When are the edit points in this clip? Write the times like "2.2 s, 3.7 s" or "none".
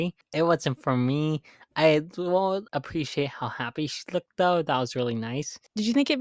2.7 s